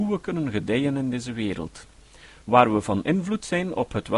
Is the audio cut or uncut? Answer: uncut